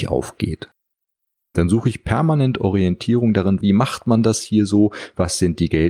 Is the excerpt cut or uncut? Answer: cut